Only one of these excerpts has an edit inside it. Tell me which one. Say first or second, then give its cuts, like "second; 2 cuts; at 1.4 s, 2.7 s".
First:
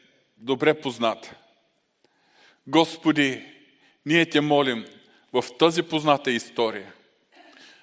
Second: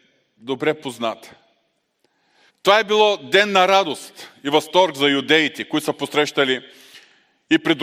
second; 1 cut; at 2.5 s